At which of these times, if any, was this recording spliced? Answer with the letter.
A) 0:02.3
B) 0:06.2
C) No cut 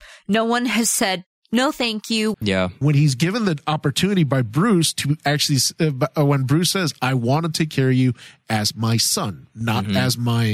A